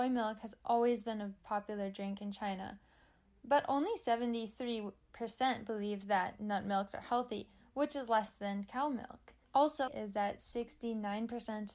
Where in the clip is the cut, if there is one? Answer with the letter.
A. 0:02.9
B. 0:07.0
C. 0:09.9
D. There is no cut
C